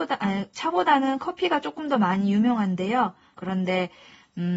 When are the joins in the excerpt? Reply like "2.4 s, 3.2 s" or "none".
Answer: 3.3 s

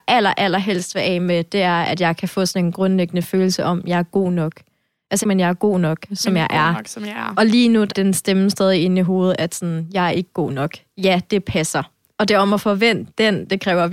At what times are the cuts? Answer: 5.2 s, 7.9 s

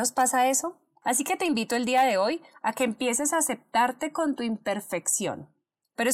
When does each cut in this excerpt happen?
1.0 s

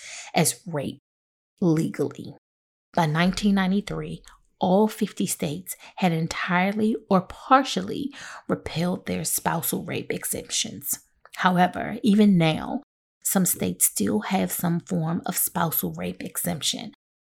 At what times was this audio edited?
none

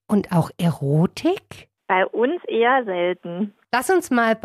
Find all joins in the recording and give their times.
none

